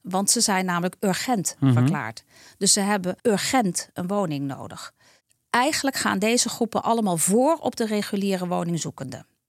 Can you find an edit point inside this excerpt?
yes; 1 cut; at 3.2 s

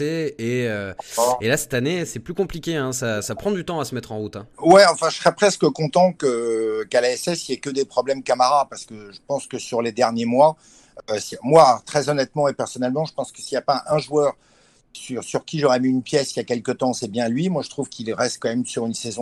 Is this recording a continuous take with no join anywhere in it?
no; 2 cuts; at 4.5 s, 11.8 s

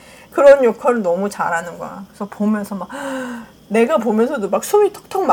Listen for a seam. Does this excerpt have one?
no; 0 cuts

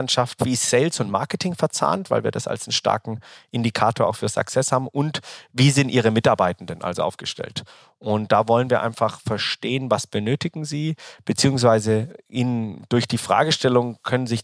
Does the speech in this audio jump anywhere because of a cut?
no; 0 cuts

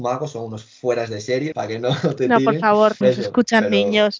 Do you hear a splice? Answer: yes; 2 cuts; at 1.5 s, 3.0 s

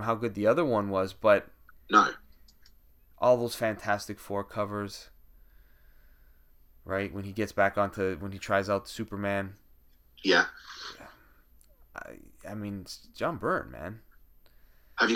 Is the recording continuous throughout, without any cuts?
no; 1 cut; at 3.1 s

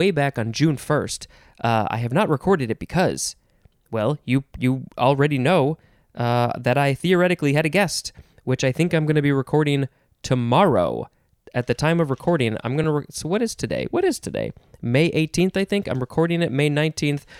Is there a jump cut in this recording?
no; 0 cuts

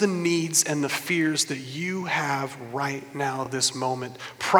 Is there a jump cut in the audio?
no; 0 cuts

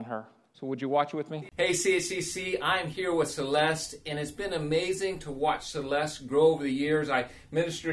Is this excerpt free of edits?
yes; 0 cuts

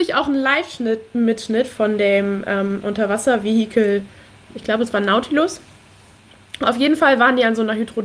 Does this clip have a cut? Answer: no; 0 cuts

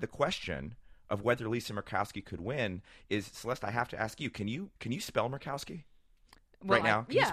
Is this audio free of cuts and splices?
no; 1 cut; at 4.8 s

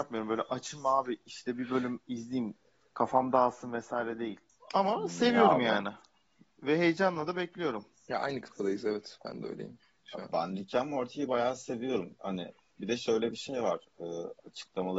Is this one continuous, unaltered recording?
yes; 0 cuts

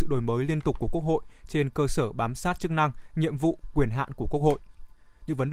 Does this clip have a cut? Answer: no; 0 cuts

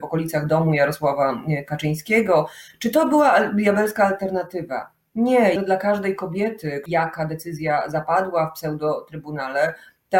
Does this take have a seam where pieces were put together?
yes; 2 cuts; at 5.6 s, 6.9 s

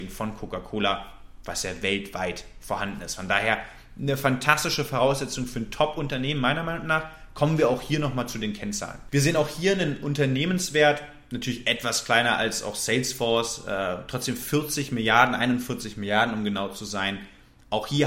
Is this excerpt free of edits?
yes; 0 cuts

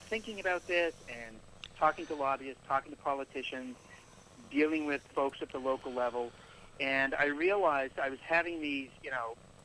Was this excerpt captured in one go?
no; 1 cut; at 5.1 s

